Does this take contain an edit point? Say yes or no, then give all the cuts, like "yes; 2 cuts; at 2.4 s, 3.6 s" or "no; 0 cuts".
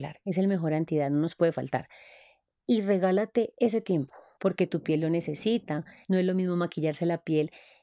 yes; 2 cuts; at 4.4 s, 6.0 s